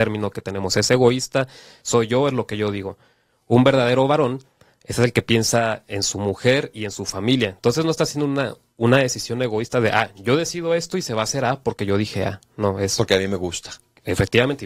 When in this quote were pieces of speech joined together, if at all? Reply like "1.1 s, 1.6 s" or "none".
none